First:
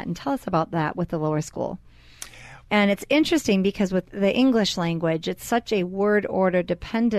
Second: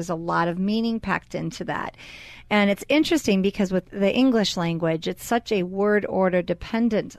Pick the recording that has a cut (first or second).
first